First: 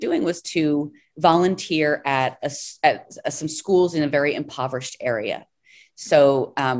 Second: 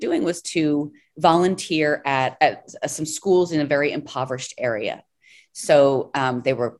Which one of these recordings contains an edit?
second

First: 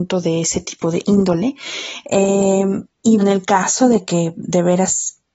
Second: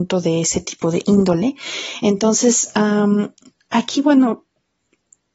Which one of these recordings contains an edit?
first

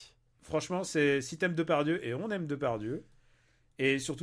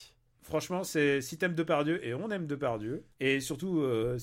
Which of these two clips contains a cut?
second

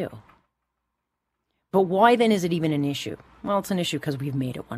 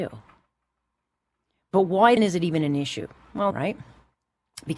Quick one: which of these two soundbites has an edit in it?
second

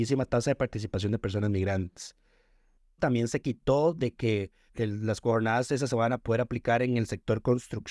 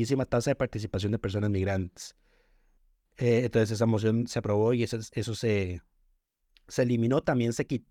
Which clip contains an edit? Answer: first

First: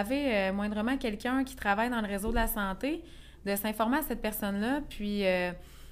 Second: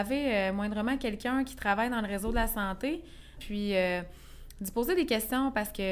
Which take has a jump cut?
second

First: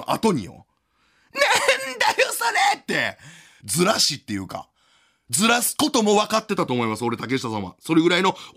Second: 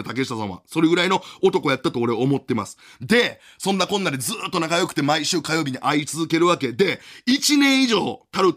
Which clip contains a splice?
first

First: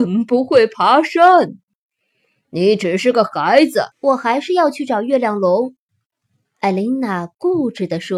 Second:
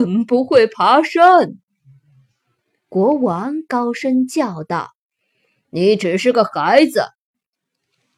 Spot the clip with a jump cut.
first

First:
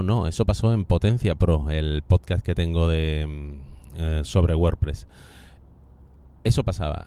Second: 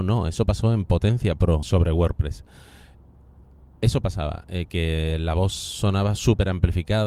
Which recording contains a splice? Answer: second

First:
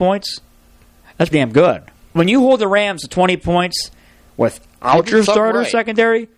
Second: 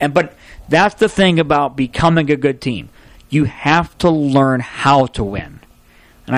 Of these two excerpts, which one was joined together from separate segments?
first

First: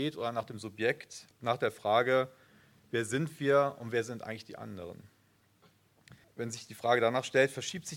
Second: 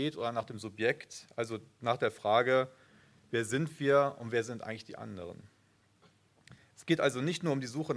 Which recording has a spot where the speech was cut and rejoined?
first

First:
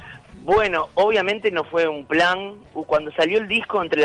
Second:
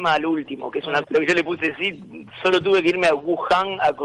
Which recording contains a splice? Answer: second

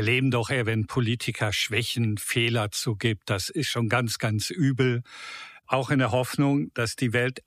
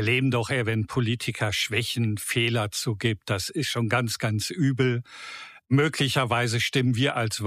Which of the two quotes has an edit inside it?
first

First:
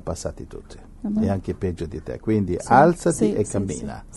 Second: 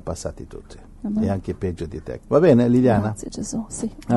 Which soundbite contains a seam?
second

